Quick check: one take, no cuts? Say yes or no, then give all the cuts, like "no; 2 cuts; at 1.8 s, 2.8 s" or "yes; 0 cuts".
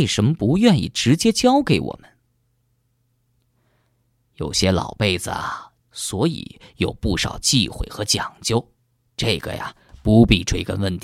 no; 1 cut; at 5.8 s